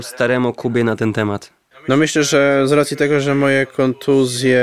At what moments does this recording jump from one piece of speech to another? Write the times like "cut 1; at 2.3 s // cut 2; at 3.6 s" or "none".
cut 1; at 1.7 s

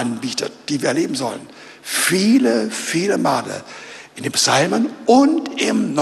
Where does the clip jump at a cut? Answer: none

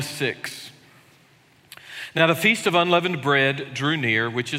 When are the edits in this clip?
none

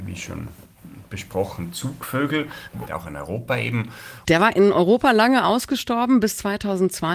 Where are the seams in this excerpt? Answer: cut 1; at 2.9 s // cut 2; at 4.2 s

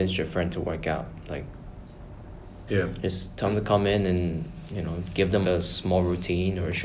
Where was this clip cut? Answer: cut 1; at 2.7 s // cut 2; at 5.4 s

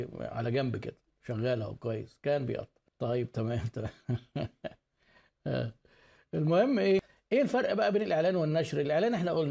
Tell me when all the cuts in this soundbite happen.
cut 1; at 2.9 s

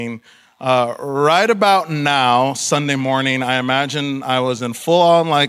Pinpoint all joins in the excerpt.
none

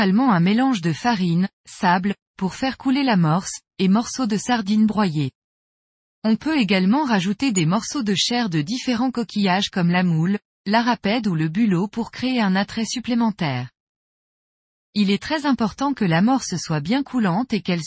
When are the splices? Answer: none

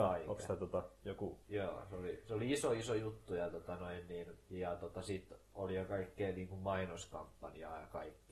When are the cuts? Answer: cut 1; at 1.4 s // cut 2; at 4.4 s

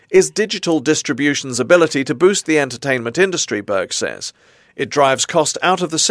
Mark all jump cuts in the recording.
none

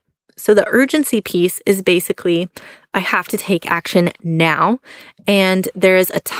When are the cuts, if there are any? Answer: none

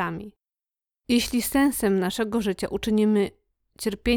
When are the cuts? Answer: none

